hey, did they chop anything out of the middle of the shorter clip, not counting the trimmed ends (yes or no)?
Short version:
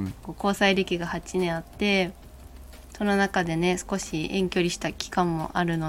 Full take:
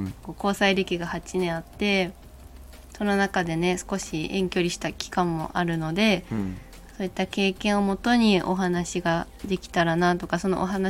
no